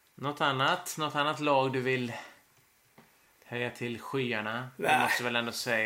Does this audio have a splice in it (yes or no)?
no